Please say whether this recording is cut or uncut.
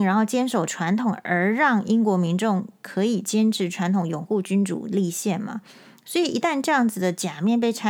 uncut